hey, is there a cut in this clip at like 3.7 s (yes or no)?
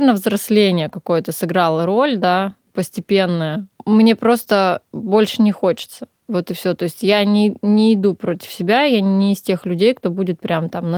no